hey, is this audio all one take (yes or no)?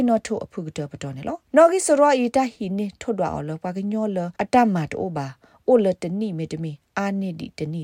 no